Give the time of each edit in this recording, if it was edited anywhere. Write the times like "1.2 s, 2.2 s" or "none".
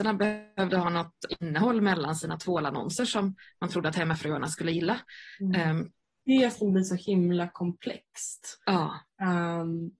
6.2 s